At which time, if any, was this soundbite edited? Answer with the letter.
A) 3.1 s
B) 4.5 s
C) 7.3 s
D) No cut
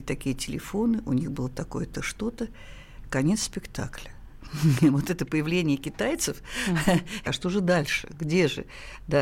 C